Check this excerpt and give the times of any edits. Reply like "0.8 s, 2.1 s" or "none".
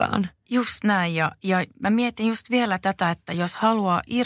none